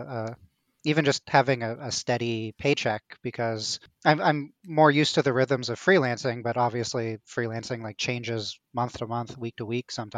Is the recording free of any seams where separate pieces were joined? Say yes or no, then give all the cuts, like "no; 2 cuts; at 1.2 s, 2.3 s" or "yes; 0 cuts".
yes; 0 cuts